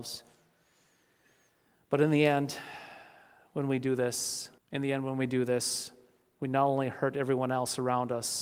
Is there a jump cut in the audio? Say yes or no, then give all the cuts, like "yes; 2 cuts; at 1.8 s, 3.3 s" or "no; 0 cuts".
yes; 1 cut; at 4.6 s